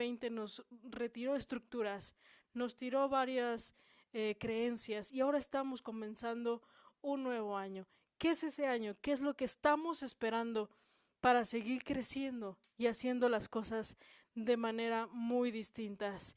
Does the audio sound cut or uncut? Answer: uncut